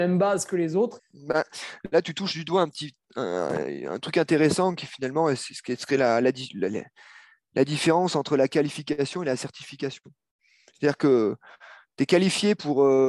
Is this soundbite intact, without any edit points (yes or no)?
no